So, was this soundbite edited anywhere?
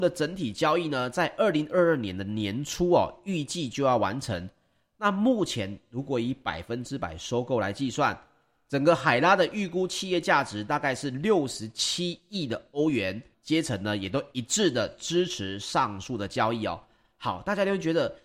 yes; 1 cut; at 13.3 s

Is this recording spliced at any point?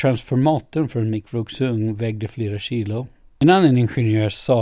no; 0 cuts

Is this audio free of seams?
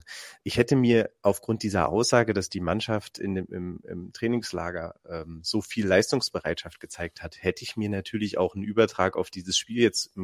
yes; 0 cuts

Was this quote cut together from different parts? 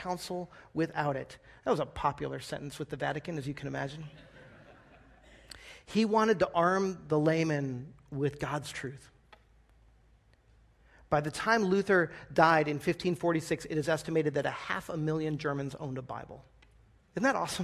no; 0 cuts

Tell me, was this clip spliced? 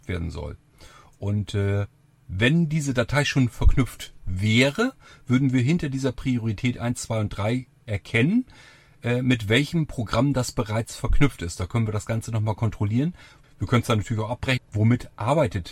yes; 2 cuts; at 13.4 s, 14.6 s

